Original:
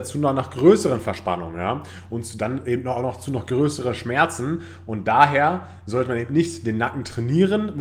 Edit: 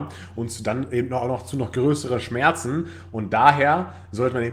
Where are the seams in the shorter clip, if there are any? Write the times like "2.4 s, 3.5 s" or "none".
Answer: none